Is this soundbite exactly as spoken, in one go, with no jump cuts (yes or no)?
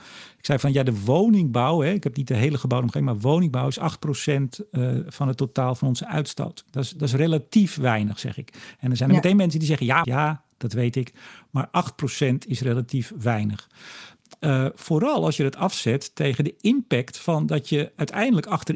no